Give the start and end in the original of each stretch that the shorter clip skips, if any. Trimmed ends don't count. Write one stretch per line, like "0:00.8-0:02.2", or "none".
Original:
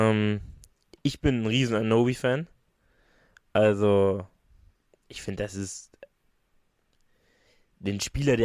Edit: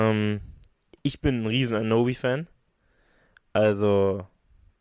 none